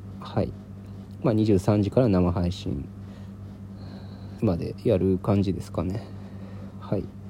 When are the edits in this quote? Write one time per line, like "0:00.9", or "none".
0:04.4